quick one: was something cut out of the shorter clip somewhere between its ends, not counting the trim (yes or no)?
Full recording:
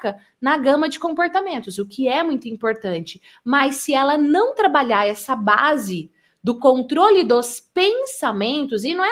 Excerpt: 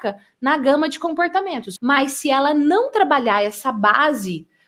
yes